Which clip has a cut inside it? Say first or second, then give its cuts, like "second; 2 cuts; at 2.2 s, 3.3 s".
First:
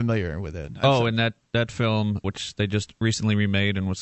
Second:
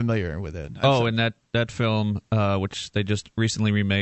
first; 1 cut; at 2.2 s